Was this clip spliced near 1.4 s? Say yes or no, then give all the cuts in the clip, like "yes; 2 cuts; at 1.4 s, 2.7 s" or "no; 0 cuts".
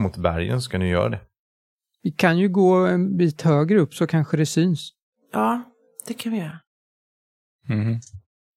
no; 0 cuts